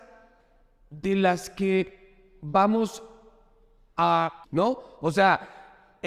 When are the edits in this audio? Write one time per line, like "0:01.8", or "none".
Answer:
0:04.4